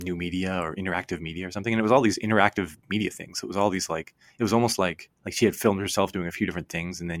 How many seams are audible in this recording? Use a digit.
1